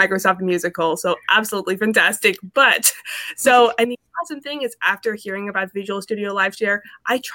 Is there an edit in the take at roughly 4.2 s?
no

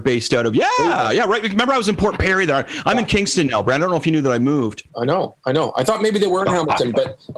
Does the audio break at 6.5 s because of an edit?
no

